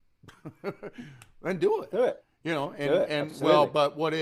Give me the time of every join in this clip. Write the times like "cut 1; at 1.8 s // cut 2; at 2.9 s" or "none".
none